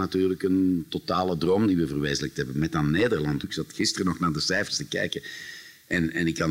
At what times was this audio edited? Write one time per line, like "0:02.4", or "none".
0:03.4